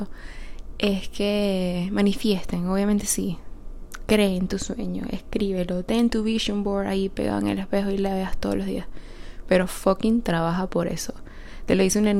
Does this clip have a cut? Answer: no; 0 cuts

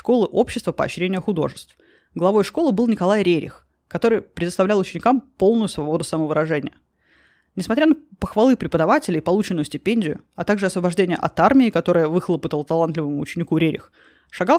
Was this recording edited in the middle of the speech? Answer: no; 0 cuts

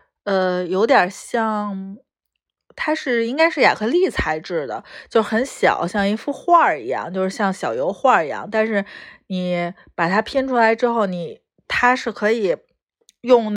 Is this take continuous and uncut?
yes; 0 cuts

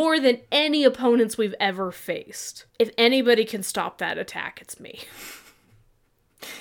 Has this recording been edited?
yes; 1 cut; at 2.7 s

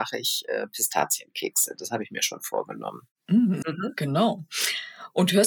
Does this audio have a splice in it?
yes; 1 cut; at 3.6 s

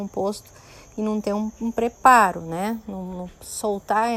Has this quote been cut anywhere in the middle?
no; 0 cuts

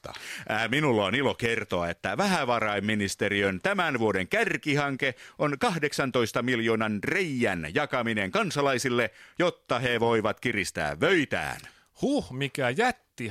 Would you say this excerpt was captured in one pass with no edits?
yes; 0 cuts

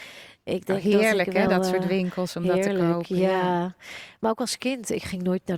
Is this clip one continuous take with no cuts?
yes; 0 cuts

